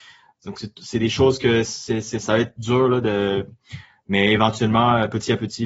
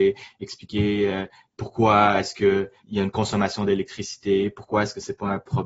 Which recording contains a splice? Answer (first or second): second